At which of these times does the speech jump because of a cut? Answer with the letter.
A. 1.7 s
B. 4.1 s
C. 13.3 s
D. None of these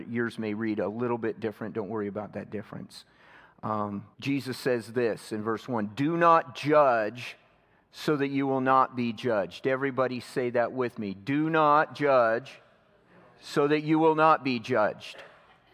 B